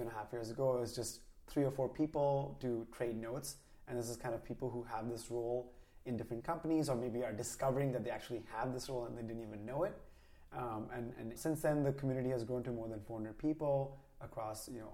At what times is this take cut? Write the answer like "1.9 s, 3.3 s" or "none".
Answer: 11.4 s